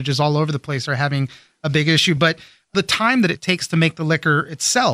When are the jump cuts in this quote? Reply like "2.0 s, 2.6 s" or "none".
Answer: none